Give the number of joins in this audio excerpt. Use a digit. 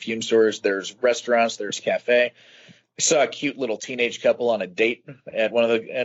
0